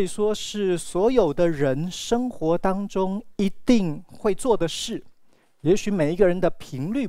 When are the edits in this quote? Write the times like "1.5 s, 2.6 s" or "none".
none